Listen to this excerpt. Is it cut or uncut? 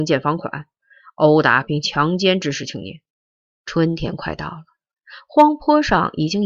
cut